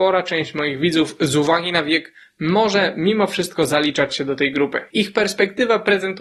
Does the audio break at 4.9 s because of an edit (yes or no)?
yes